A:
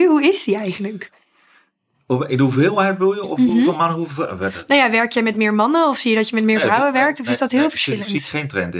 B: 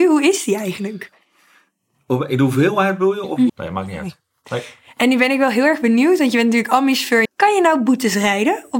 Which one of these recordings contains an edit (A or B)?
B